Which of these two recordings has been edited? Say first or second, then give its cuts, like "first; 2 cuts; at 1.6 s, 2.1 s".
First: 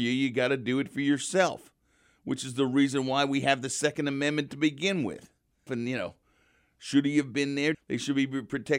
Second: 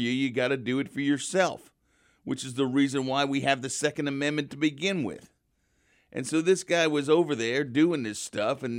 first; 2 cuts; at 5.7 s, 7.7 s